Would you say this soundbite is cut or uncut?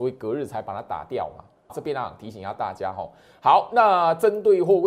cut